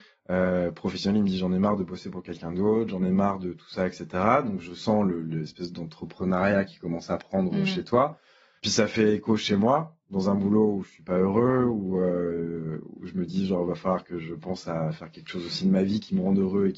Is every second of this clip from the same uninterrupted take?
yes; 0 cuts

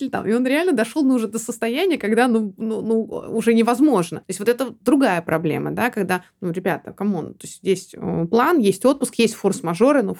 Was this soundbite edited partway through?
no; 0 cuts

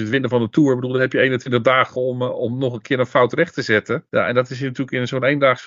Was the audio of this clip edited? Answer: no; 0 cuts

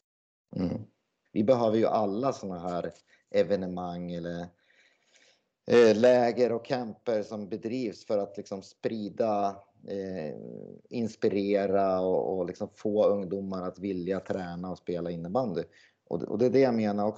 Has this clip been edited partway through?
yes; 1 cut; at 1.3 s

